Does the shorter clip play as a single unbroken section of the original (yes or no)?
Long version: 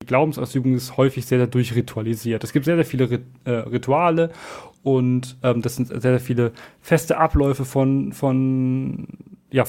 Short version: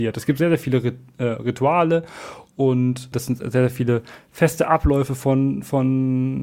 no